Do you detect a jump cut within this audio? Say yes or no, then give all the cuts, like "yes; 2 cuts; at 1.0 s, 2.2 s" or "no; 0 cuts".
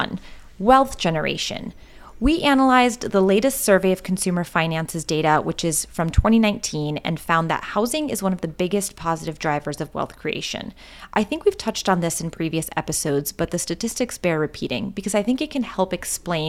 no; 0 cuts